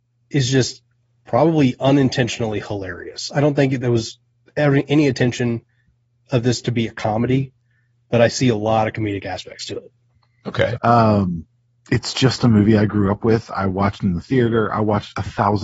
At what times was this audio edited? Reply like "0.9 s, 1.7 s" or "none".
10.8 s